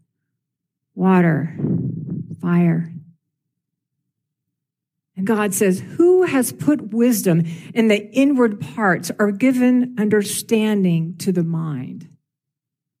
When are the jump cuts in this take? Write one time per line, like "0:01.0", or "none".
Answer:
0:05.3